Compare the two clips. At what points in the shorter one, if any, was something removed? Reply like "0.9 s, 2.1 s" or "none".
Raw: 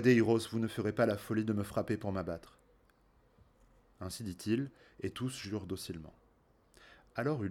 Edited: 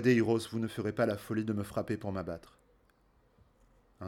none